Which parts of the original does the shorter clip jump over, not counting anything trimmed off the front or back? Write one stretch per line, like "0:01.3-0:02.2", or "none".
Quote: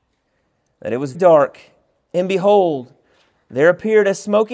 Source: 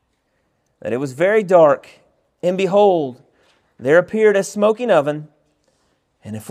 0:01.1-0:01.4